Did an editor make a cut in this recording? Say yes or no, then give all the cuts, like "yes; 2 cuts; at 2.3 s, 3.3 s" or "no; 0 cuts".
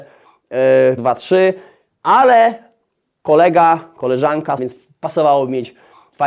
yes; 2 cuts; at 1.0 s, 4.6 s